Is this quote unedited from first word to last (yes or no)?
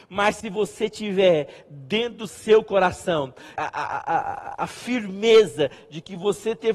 no